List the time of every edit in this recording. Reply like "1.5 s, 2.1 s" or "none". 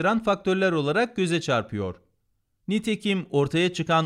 2.6 s